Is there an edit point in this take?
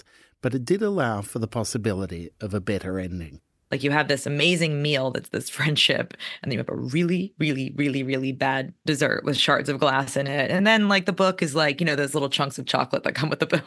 no; 0 cuts

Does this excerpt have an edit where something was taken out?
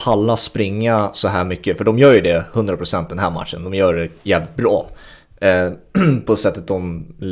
no; 0 cuts

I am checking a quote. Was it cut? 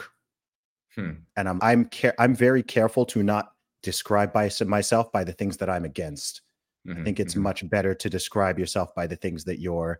yes; 1 cut; at 1.6 s

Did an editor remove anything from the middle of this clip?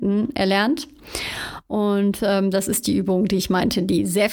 no; 0 cuts

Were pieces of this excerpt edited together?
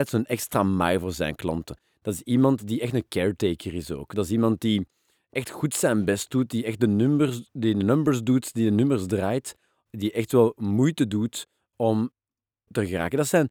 no; 0 cuts

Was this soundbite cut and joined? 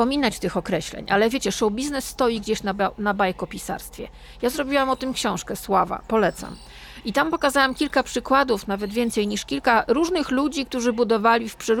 no; 0 cuts

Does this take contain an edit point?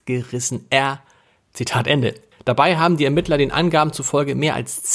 yes; 1 cut; at 2.3 s

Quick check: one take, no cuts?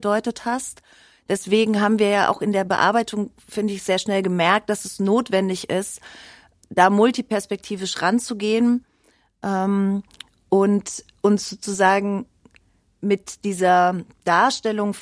yes; 0 cuts

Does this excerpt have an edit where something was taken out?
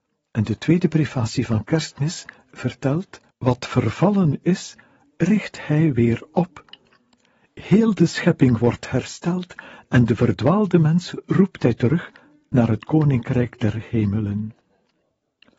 yes; 1 cut; at 3.3 s

